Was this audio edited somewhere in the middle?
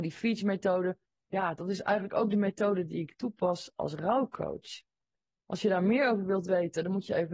no; 0 cuts

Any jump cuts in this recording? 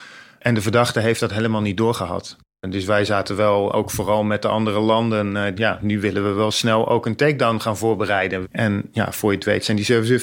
yes; 3 cuts; at 3.7 s, 5.5 s, 8.4 s

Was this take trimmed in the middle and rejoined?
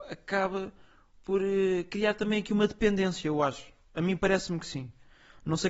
no; 0 cuts

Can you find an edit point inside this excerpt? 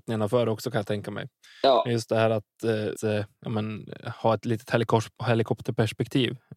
yes; 1 cut; at 3.0 s

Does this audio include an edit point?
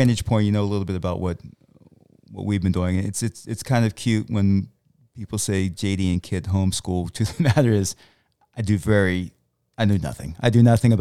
no; 0 cuts

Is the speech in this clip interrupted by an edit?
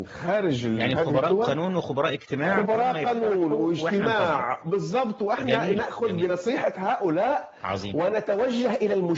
no; 0 cuts

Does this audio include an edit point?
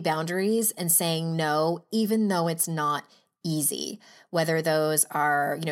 no; 0 cuts

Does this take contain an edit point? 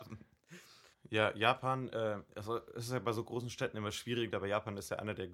yes; 2 cuts; at 0.9 s, 4.3 s

